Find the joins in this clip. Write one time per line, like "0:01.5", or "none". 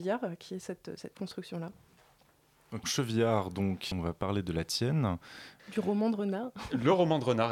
0:02.8
0:03.9
0:05.6